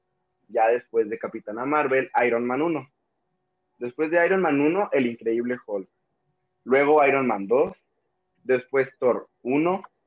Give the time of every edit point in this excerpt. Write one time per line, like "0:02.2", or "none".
none